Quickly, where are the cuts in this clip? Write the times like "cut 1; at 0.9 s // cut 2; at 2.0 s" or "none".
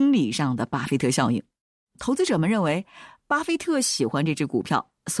none